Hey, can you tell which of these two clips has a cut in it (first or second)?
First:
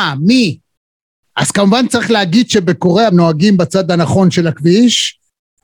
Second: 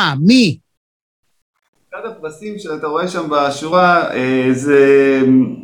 first